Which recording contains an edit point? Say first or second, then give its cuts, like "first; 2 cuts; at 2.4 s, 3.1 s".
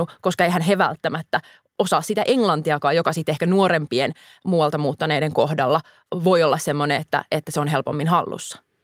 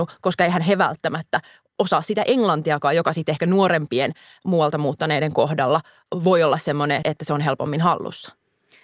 second; 1 cut; at 7.0 s